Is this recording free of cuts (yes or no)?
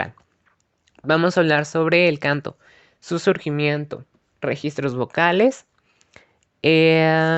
yes